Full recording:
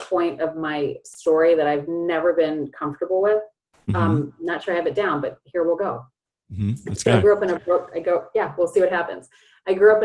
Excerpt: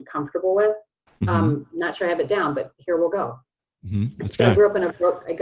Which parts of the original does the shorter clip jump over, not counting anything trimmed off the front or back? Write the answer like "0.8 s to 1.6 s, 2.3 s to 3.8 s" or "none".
none